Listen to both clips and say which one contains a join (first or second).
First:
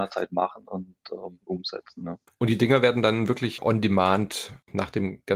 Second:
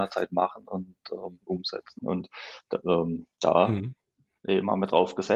second